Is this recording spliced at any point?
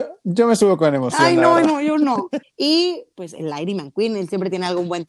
yes; 1 cut; at 2.4 s

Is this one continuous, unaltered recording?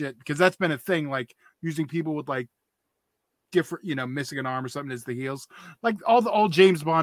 yes; 0 cuts

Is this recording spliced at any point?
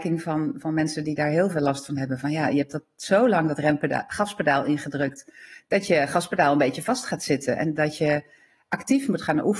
no; 0 cuts

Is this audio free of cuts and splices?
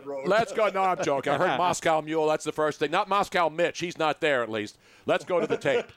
yes; 0 cuts

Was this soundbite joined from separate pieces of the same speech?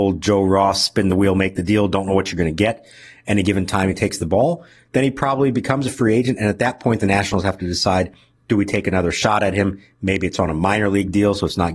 no; 0 cuts

